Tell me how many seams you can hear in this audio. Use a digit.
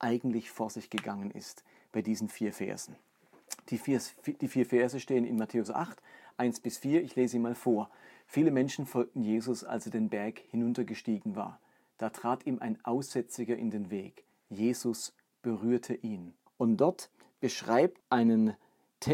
3